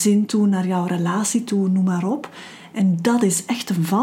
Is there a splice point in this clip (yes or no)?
no